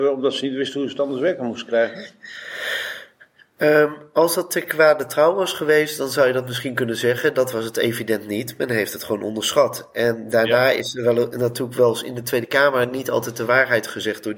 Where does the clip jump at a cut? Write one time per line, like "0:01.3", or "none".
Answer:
none